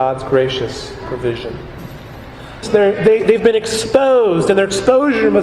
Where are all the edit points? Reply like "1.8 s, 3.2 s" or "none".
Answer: 2.6 s